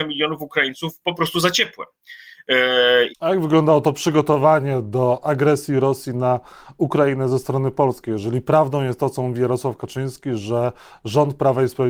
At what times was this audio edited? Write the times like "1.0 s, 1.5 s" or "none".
3.1 s